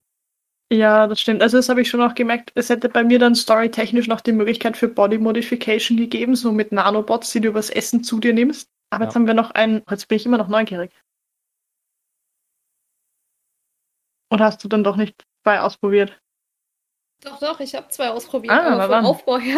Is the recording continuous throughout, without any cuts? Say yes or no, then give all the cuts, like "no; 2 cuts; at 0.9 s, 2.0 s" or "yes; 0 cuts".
no; 3 cuts; at 3.4 s, 8.8 s, 9.9 s